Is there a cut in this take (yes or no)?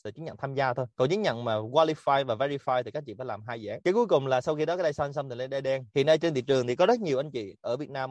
yes